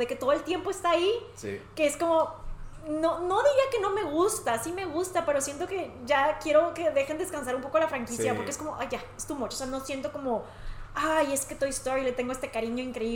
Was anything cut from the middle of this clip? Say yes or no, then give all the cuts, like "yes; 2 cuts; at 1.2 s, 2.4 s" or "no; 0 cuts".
no; 0 cuts